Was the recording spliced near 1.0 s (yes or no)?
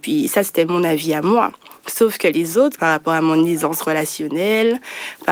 no